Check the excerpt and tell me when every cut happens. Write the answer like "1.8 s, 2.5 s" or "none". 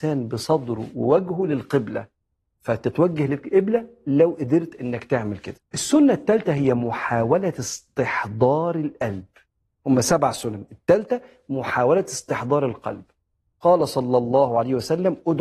5.6 s